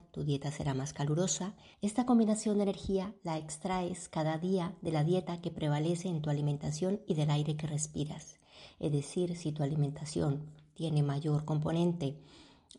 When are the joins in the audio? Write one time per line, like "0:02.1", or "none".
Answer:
0:01.7